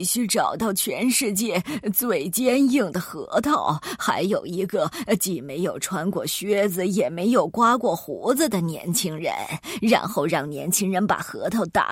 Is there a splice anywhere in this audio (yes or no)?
no